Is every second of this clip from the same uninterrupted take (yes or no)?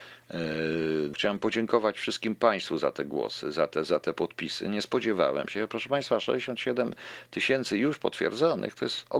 no